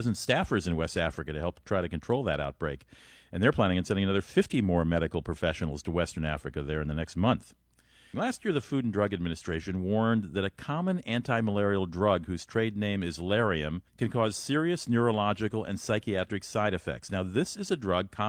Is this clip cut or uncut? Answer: cut